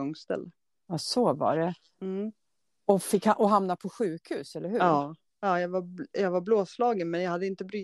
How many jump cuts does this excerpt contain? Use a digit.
1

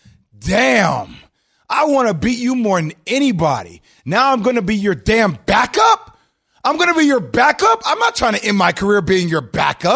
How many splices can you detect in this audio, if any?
0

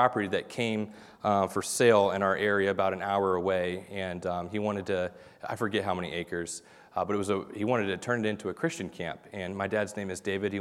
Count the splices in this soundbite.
0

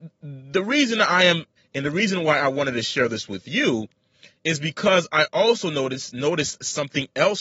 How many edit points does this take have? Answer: 1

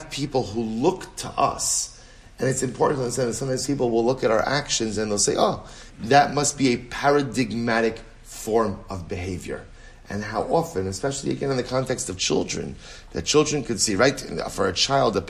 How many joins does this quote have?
1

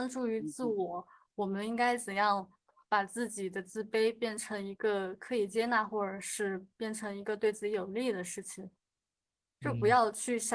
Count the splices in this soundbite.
0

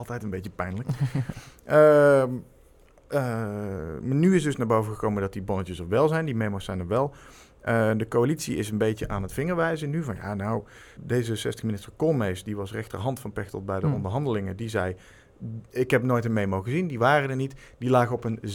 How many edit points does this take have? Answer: 1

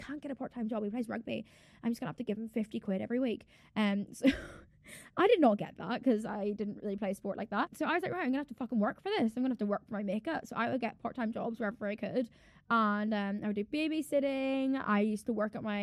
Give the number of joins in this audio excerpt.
0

